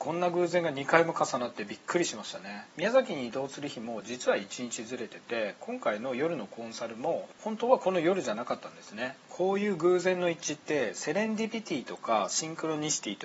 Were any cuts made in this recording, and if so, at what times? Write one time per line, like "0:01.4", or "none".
0:02.7
0:09.2